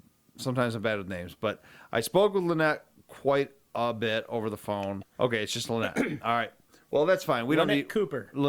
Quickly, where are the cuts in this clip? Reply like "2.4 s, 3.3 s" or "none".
5.0 s